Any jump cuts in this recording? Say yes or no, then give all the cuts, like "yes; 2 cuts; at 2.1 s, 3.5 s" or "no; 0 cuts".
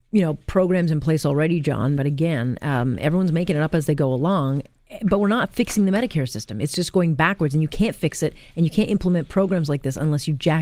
yes; 1 cut; at 2.0 s